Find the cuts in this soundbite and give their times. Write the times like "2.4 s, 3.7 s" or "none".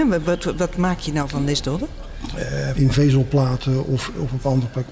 2.8 s